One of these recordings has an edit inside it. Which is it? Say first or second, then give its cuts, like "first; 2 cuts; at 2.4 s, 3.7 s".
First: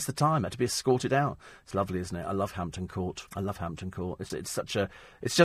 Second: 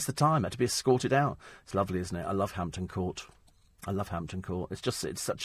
first; 2 cuts; at 3.3 s, 4.3 s